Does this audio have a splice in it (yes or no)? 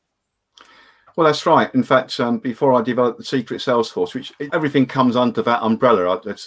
yes